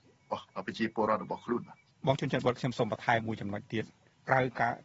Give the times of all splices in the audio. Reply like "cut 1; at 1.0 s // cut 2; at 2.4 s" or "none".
cut 1; at 3.2 s

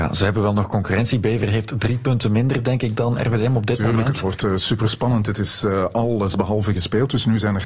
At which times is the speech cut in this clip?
none

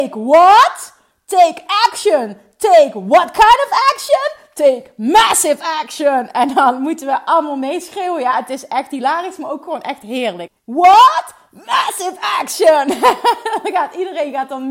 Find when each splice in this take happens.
cut 1; at 10.5 s

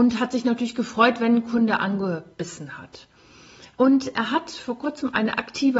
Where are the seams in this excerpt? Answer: cut 1; at 3.8 s

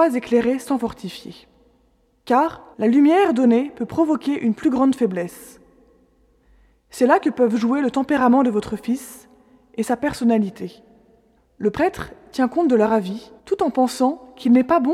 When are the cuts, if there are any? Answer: cut 1; at 2.7 s // cut 2; at 11.4 s // cut 3; at 13.4 s

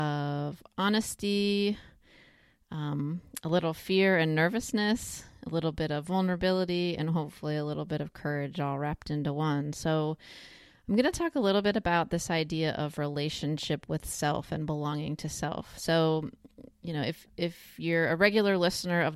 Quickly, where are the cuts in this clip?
none

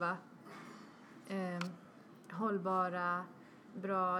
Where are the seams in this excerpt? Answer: none

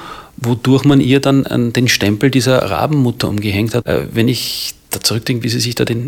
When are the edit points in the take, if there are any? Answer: cut 1; at 3.8 s

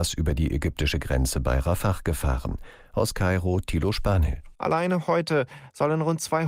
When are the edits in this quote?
cut 1; at 4.5 s

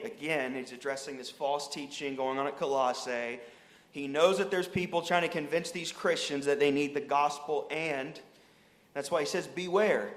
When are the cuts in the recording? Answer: none

